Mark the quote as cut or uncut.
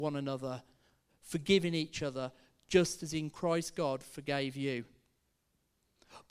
uncut